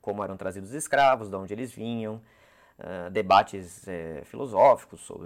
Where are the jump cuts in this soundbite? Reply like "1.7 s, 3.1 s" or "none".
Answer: none

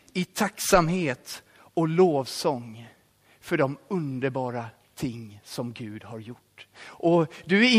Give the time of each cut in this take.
6.7 s

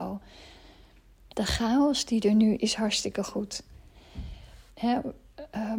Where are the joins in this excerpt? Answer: 1.3 s, 2.6 s, 4.7 s

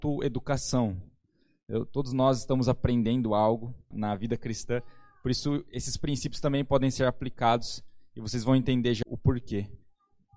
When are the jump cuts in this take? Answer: 3.9 s, 9.0 s

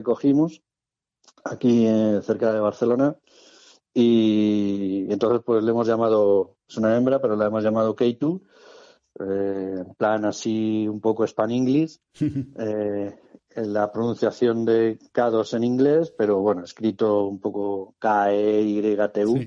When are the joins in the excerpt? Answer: none

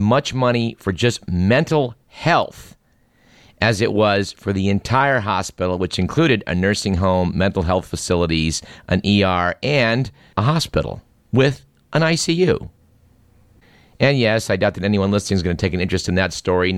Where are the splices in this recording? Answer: none

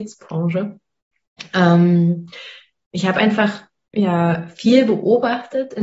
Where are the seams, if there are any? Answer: none

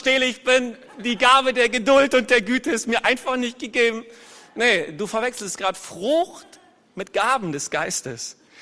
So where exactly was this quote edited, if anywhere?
none

